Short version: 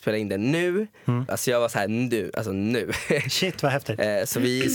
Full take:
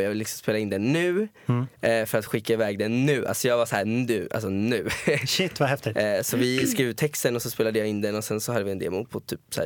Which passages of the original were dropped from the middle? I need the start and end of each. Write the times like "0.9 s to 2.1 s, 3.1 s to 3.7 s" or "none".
1.7 s to 3.3 s